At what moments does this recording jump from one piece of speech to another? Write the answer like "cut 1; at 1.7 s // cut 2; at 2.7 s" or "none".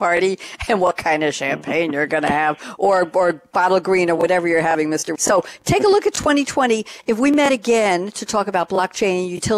cut 1; at 5.1 s